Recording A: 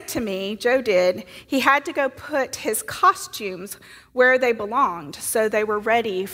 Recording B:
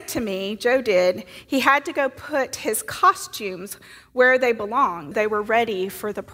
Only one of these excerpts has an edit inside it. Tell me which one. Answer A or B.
B